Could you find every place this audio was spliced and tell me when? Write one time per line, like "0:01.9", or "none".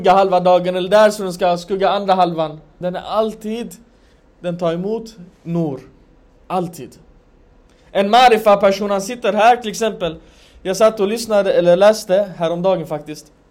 0:02.8